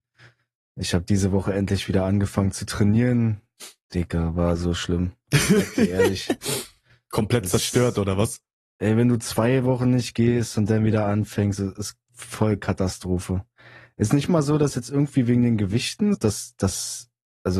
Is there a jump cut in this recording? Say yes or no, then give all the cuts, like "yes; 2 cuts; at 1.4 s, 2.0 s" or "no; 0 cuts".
yes; 1 cut; at 16.1 s